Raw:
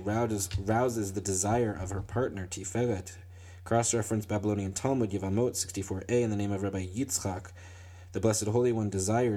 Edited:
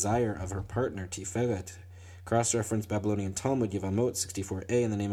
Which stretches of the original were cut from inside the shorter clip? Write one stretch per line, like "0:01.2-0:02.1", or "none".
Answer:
none